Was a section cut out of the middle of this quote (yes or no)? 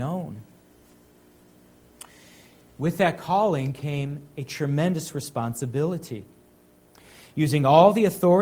yes